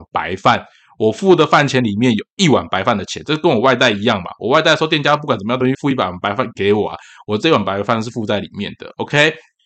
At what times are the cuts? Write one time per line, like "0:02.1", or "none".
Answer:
0:05.7